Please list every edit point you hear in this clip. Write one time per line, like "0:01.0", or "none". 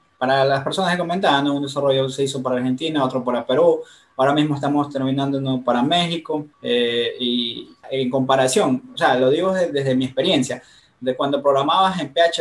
0:06.5

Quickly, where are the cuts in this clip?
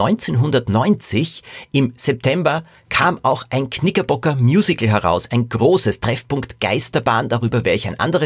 none

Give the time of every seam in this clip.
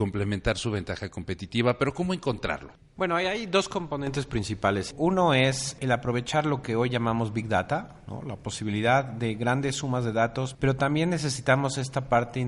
0:10.5

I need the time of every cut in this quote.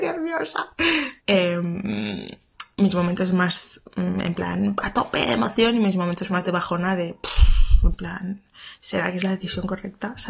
0:01.2

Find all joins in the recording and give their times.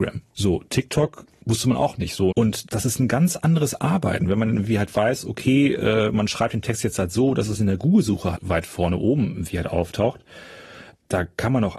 0:02.3
0:08.3

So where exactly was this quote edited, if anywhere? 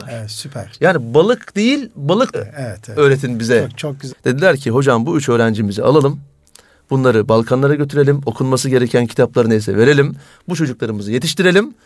0:02.3
0:04.1

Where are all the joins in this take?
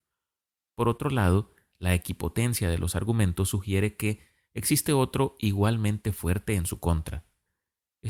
0:04.5

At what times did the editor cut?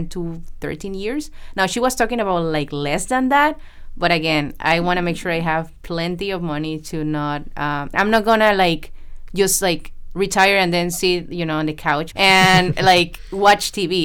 0:07.9
0:12.1

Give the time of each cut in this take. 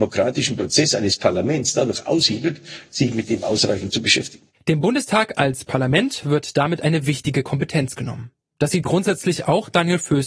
0:02.9

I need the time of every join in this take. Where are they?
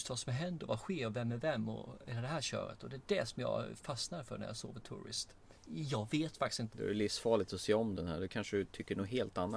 0:05.6
0:06.7

